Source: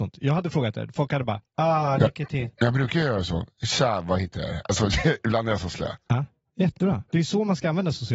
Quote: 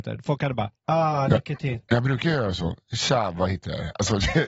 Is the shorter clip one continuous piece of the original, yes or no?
yes